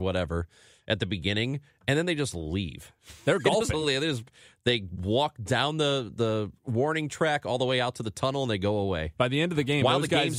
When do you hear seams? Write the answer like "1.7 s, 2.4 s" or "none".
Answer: none